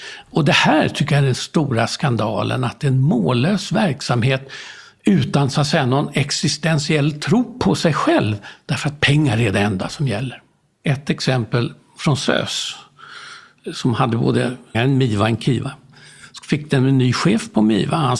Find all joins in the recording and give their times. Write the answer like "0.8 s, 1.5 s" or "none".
14.7 s